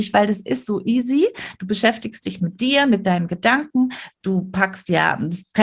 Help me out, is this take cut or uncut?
uncut